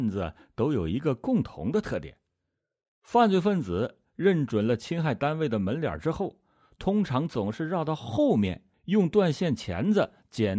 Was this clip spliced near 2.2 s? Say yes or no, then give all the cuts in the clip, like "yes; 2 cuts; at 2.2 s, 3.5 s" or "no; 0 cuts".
no; 0 cuts